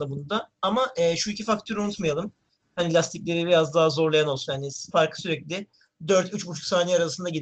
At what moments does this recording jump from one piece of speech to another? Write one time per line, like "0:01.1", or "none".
0:02.6
0:04.5